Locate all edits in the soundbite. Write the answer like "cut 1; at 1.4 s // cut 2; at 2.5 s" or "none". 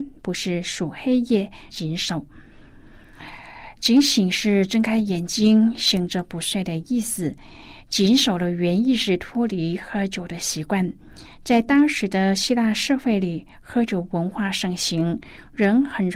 cut 1; at 1.7 s